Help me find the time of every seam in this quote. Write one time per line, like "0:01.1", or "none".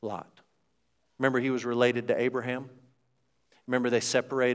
none